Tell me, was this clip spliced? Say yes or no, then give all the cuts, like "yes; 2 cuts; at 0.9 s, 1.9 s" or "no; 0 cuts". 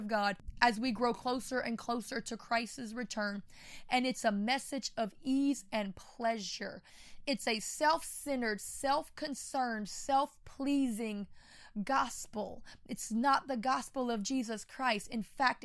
no; 0 cuts